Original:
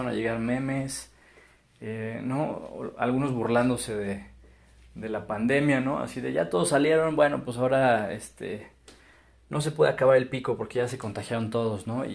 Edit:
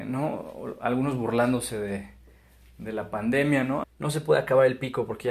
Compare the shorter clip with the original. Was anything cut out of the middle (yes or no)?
yes